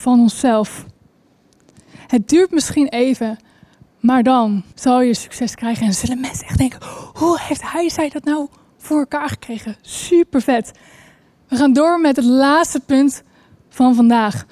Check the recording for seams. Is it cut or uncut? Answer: cut